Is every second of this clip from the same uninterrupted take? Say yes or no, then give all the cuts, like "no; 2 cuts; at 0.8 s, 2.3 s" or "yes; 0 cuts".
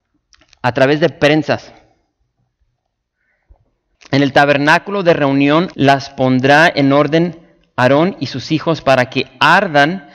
no; 2 cuts; at 3.9 s, 5.7 s